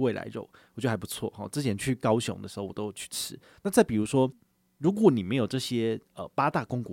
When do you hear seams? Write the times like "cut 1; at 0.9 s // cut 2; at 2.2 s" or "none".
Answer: cut 1; at 3.5 s